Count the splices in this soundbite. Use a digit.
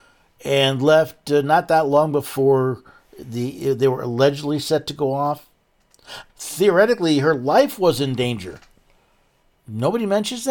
1